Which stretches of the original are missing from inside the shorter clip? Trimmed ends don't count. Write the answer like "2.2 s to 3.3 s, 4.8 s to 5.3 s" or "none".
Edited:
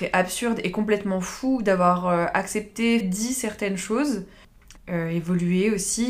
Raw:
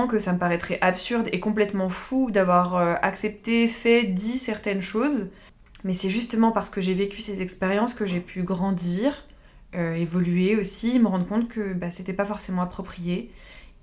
3.7 s to 4.0 s, 5.8 s to 9.6 s